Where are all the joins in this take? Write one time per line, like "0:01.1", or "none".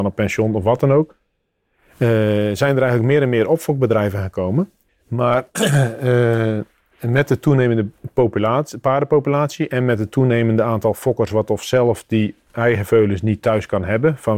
0:04.9